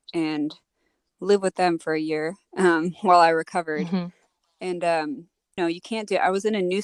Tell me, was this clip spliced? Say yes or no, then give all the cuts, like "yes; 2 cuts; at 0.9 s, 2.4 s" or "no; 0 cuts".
yes; 1 cut; at 5.6 s